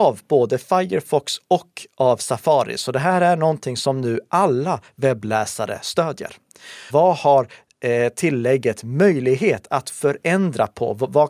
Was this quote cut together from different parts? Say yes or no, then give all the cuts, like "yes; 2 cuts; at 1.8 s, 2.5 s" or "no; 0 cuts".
yes; 1 cut; at 6.9 s